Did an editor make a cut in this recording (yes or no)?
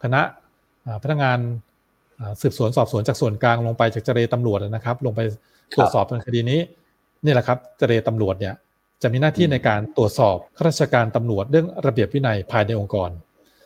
yes